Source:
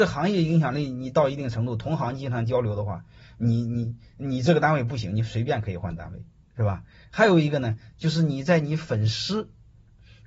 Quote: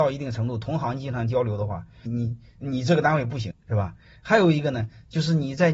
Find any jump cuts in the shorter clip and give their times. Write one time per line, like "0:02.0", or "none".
0:02.1
0:03.5